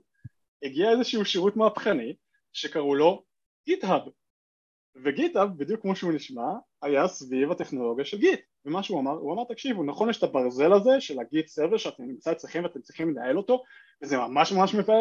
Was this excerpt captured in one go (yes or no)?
yes